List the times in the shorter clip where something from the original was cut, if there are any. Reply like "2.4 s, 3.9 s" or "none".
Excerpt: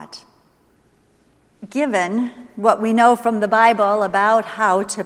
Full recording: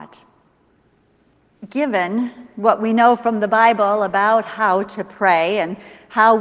none